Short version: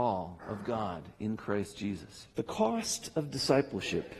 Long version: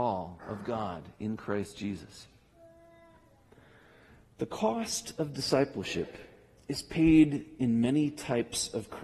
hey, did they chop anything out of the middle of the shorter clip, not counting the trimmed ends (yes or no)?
yes